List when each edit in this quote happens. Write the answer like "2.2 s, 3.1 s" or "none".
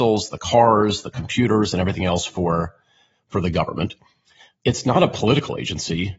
none

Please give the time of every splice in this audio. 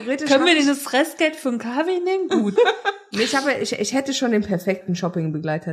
2.6 s

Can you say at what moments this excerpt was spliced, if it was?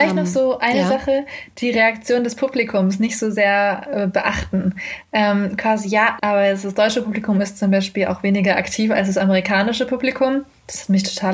6.2 s

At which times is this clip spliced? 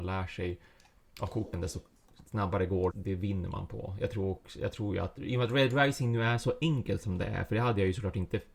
2.9 s

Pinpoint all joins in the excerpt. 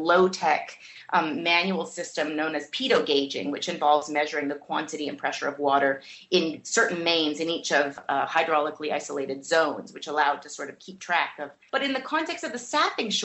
11.7 s

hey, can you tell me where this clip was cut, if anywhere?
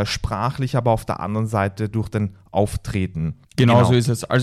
3.4 s

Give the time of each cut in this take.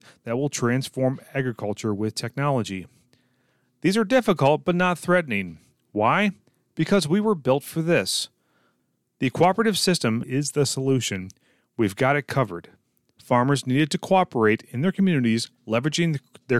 10.2 s, 13.2 s

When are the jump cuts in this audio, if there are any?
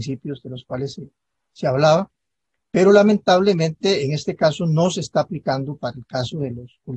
none

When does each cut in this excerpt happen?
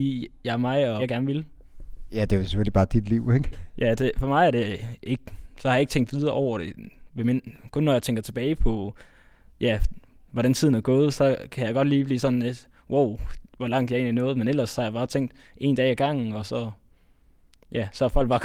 1.0 s

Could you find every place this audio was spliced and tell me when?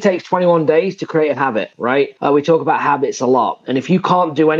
none

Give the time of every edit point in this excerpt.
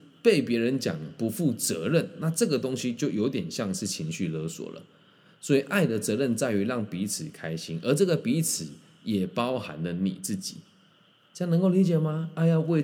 none

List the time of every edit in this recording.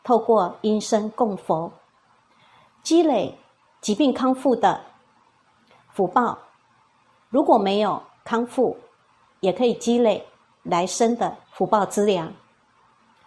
11.4 s

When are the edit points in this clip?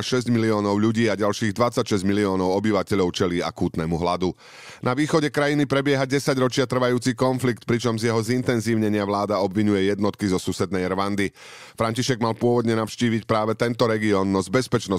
none

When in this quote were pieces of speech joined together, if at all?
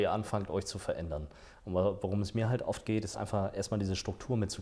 none

